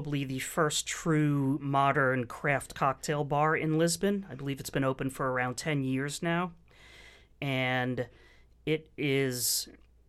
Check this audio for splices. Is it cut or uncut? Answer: uncut